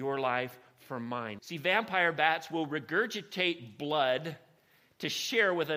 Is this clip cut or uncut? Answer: cut